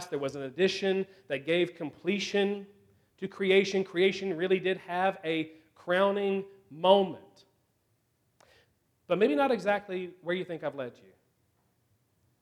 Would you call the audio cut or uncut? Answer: uncut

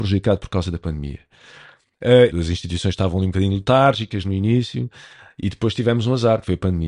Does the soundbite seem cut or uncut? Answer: cut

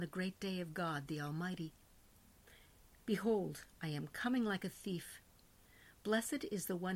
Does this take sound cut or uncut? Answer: uncut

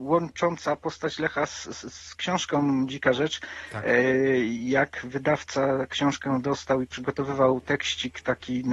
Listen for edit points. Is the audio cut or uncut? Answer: uncut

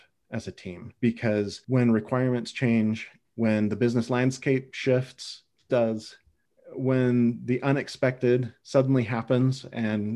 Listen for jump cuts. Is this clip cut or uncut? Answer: cut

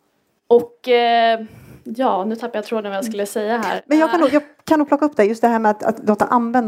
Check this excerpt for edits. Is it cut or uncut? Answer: uncut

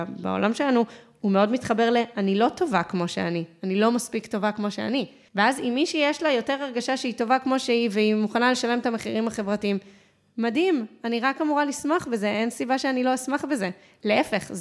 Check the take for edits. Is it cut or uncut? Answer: uncut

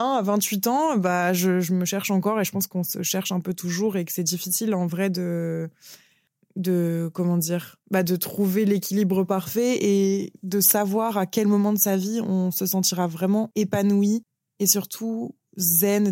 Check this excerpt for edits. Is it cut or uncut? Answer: uncut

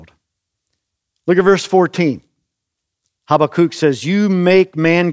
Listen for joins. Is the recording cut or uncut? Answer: uncut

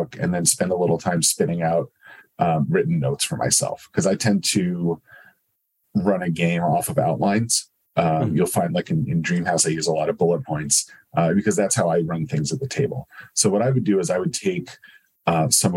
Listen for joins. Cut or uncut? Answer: uncut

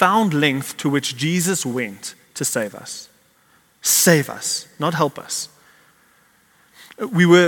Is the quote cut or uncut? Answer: uncut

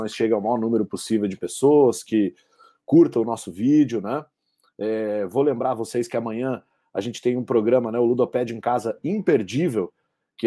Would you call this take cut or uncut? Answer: uncut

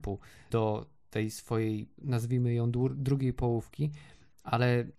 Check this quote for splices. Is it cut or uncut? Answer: uncut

